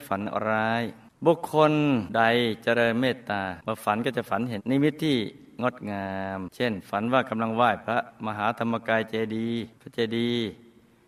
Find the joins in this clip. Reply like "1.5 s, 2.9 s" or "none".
4.6 s, 9.7 s